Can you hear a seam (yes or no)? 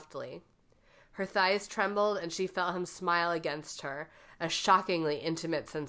no